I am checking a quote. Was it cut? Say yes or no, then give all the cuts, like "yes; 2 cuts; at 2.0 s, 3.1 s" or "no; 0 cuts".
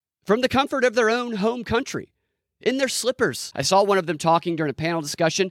yes; 1 cut; at 3.5 s